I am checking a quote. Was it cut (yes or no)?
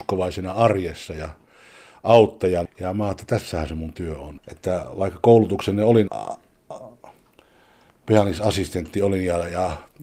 yes